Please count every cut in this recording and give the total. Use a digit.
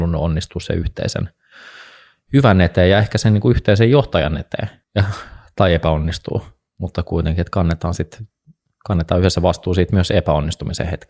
1